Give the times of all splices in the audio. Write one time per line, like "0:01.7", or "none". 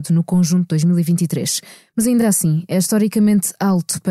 none